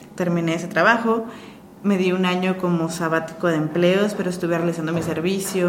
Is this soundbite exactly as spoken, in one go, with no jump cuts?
yes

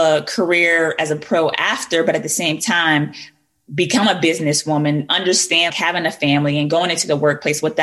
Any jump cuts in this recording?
yes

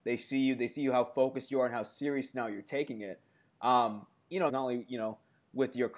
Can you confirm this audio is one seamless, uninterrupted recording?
no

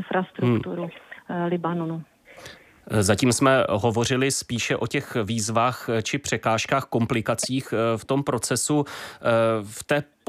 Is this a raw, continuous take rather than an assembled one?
yes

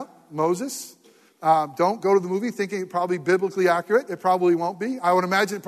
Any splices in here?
no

